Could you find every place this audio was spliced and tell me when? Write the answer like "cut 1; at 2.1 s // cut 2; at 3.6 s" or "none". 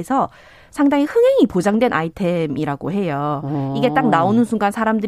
none